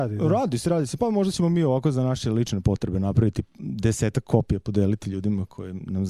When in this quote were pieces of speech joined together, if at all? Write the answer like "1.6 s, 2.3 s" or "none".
none